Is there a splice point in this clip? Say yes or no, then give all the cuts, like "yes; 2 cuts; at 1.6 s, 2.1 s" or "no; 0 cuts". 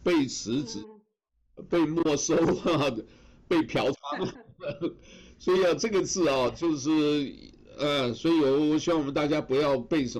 no; 0 cuts